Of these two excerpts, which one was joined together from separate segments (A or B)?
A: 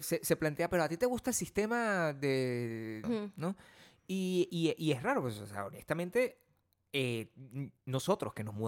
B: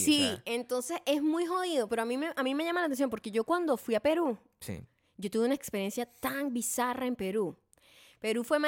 A